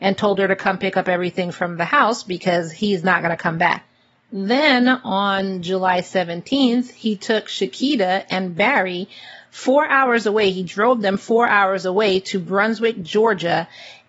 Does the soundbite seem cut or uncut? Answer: uncut